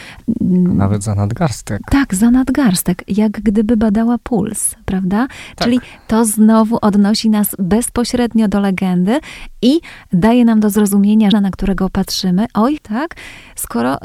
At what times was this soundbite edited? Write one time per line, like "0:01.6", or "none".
0:11.3
0:12.8

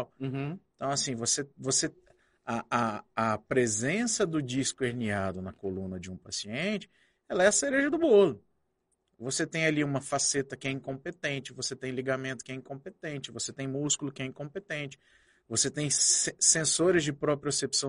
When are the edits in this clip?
none

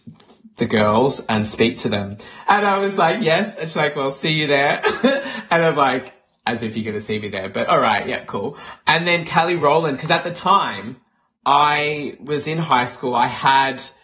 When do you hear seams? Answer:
0:02.5

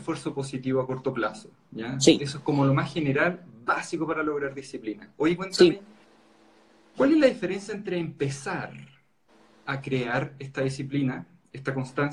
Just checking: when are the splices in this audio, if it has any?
none

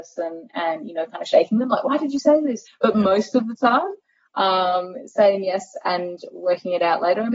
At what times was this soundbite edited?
0:02.7

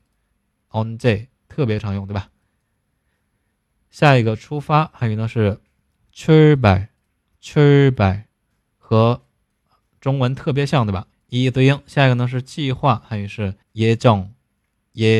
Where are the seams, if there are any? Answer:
0:11.1
0:13.6

